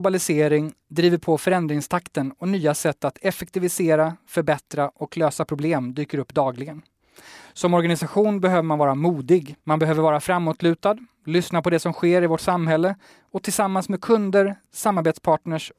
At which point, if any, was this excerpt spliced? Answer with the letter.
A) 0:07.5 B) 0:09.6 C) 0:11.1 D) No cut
B